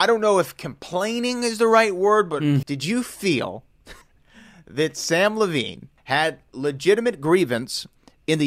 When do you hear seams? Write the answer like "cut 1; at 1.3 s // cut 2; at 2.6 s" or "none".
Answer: cut 1; at 2.6 s // cut 2; at 4.0 s // cut 3; at 6.0 s